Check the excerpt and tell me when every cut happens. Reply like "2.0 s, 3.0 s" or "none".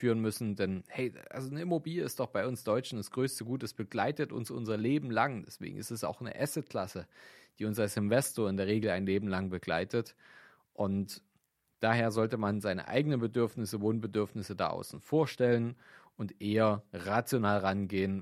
none